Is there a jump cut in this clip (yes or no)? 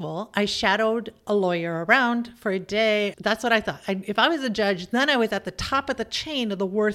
yes